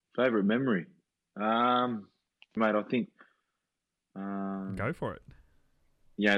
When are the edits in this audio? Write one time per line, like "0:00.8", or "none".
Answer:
0:02.6